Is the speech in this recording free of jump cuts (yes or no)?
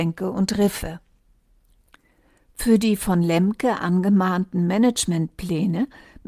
yes